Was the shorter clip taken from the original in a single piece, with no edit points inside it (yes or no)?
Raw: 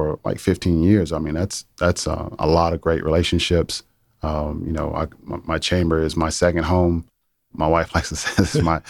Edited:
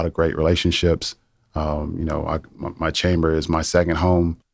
yes